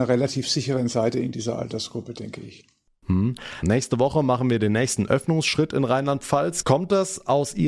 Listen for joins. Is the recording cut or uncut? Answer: cut